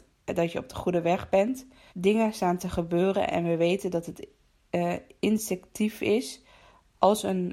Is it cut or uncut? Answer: cut